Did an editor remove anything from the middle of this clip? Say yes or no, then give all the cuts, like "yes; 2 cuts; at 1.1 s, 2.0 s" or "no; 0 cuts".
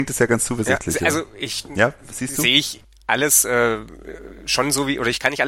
no; 0 cuts